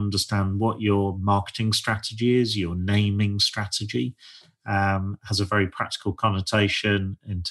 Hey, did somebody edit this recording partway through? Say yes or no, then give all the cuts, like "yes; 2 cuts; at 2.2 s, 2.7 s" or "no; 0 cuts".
no; 0 cuts